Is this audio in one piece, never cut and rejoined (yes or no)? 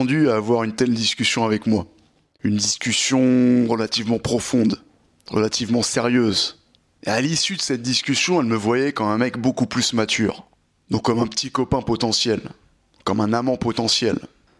yes